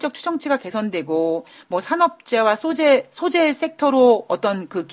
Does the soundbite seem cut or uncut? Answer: uncut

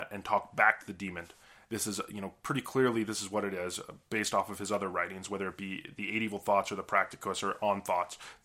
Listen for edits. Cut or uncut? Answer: cut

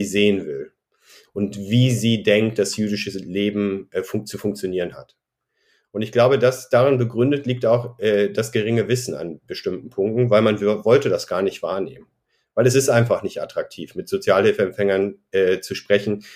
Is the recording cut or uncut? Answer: uncut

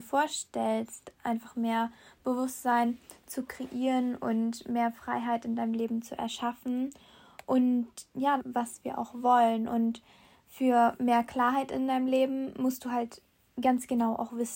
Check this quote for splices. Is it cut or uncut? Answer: cut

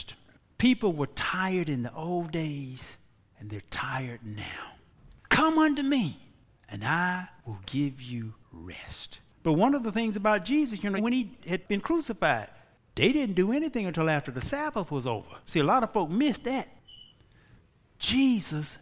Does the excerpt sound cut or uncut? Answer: cut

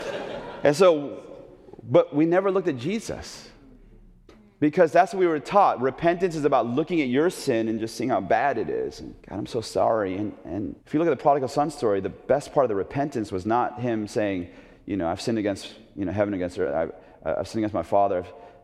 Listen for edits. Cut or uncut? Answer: cut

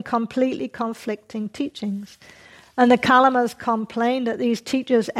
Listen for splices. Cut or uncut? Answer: uncut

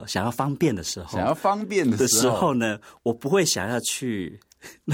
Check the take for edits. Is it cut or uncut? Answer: uncut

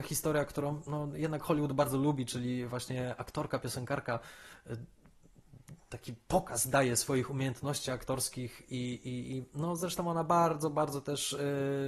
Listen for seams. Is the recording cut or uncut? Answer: uncut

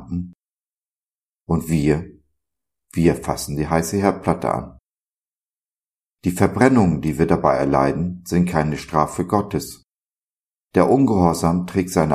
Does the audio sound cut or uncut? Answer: cut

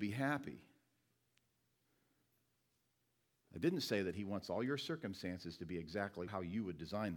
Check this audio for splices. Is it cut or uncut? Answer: uncut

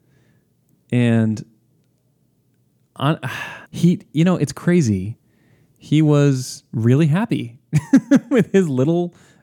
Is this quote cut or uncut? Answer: cut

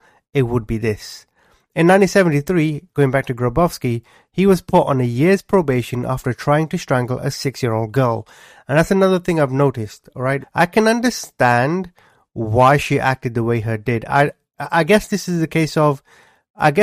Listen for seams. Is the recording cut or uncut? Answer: cut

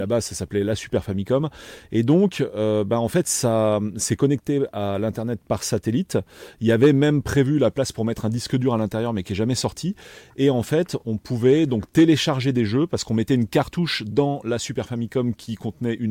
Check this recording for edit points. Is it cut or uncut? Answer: uncut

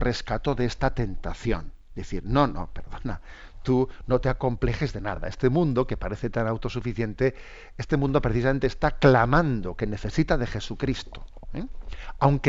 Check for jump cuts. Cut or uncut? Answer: uncut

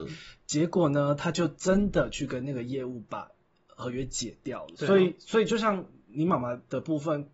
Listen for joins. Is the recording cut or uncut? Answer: cut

